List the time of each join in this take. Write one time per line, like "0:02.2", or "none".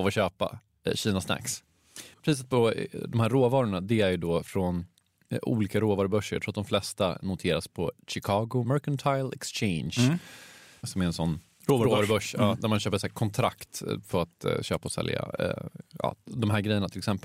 0:02.1